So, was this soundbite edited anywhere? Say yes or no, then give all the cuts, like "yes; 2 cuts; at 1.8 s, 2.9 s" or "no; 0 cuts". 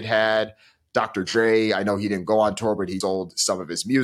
yes; 1 cut; at 3.0 s